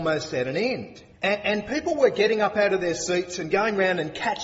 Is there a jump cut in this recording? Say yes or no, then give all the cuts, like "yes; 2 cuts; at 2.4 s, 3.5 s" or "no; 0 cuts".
yes; 1 cut; at 1.1 s